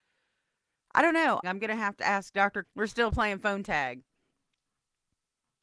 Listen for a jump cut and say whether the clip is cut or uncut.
cut